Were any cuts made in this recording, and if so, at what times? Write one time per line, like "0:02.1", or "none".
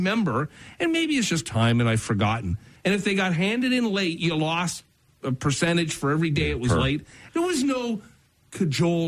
0:02.8
0:07.3